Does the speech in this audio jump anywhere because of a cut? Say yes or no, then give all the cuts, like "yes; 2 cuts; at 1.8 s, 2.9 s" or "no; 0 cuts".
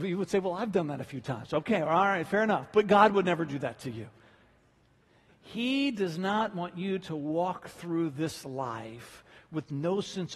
no; 0 cuts